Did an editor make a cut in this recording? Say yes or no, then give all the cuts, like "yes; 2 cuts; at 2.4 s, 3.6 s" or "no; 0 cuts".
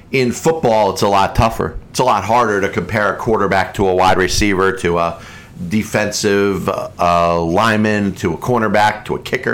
no; 0 cuts